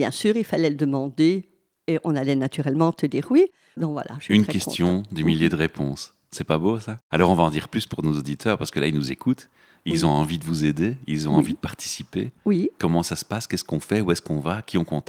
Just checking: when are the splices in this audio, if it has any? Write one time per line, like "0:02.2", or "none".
none